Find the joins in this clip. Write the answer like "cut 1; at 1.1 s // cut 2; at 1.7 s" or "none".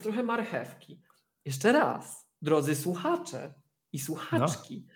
cut 1; at 2.4 s